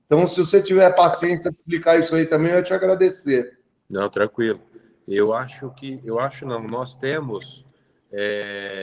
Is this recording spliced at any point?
no; 0 cuts

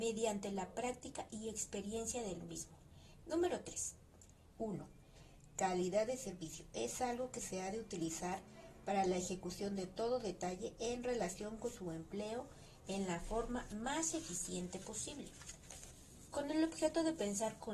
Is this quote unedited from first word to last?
no; 2 cuts; at 3.2 s, 4.6 s

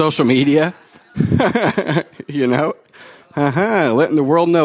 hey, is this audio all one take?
yes; 0 cuts

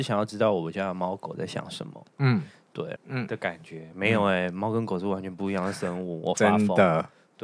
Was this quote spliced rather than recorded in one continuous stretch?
yes; 1 cut; at 3.0 s

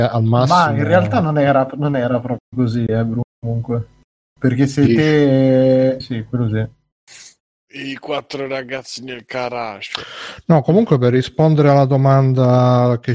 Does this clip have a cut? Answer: yes; 1 cut; at 6.0 s

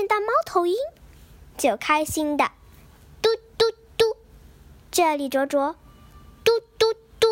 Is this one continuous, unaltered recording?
yes; 0 cuts

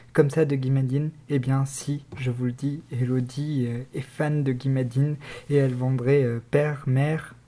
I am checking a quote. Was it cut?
no; 0 cuts

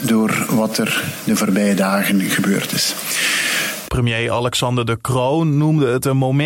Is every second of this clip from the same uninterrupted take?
no; 1 cut; at 3.8 s

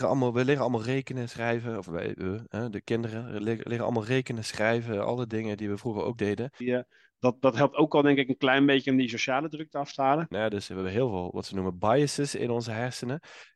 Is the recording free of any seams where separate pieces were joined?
no; 2 cuts; at 6.6 s, 10.3 s

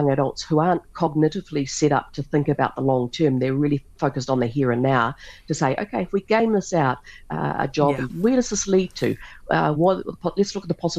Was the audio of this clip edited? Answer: yes; 2 cuts; at 8.1 s, 9.8 s

